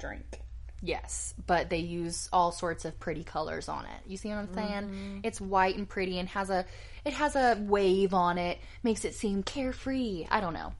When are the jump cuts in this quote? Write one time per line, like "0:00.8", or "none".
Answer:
none